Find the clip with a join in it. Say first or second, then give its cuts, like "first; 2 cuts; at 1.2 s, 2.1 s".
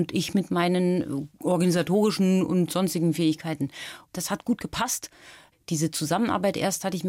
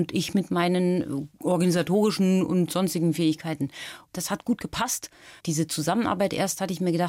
second; 1 cut; at 5.4 s